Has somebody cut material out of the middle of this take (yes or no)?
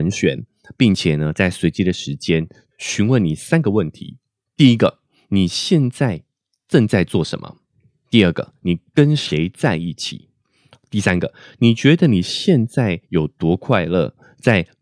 no